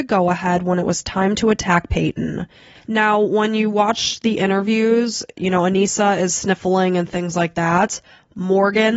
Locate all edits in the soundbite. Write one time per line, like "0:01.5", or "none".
0:02.7
0:05.4